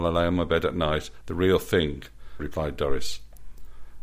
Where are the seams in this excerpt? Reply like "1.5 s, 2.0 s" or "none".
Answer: 1.2 s, 2.4 s